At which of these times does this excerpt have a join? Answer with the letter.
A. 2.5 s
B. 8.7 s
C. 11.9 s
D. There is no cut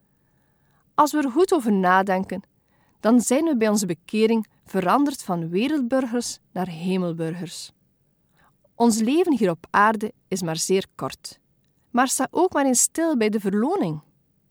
C